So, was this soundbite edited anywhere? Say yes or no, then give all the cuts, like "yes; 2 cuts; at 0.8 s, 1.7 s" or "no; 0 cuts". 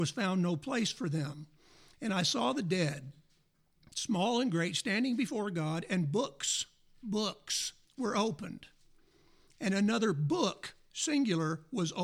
yes; 1 cut; at 7.8 s